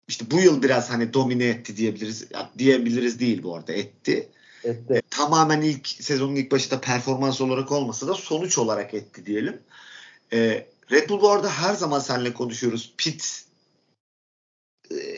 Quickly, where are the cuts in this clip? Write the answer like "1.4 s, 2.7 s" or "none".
5.0 s